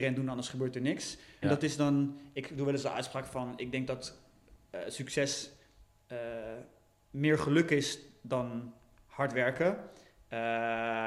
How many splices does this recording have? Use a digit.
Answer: 1